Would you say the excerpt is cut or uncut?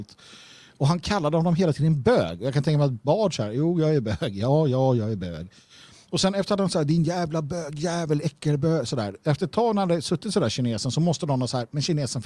uncut